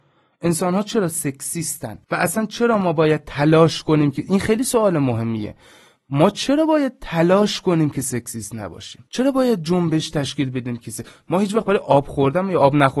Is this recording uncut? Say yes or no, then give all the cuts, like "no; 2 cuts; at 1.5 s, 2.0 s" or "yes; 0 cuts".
no; 2 cuts; at 2.0 s, 9.1 s